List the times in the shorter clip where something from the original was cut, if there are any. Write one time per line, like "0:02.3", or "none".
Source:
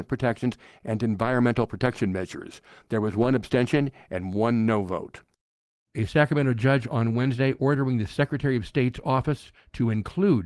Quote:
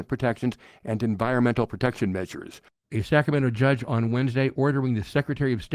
0:02.7